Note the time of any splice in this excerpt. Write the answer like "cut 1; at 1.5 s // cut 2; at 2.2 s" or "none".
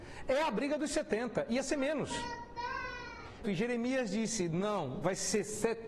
cut 1; at 3.4 s